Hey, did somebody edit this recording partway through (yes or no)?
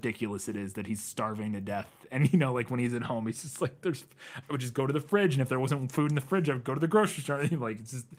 no